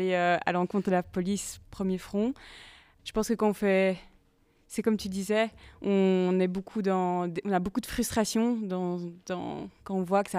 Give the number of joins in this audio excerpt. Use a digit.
1